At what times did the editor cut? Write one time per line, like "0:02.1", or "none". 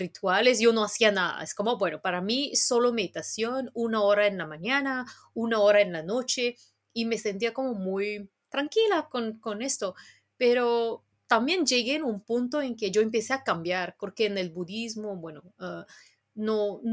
0:14.0